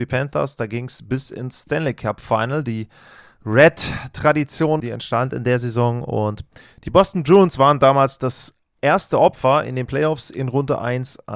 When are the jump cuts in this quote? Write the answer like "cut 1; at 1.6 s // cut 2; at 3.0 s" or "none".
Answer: cut 1; at 4.8 s